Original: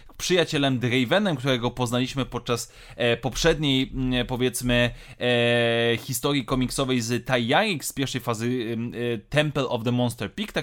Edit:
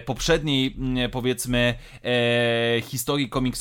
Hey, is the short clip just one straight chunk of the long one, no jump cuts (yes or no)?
yes